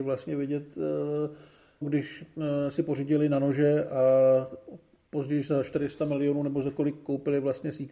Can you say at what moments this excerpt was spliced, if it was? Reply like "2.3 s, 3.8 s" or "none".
1.8 s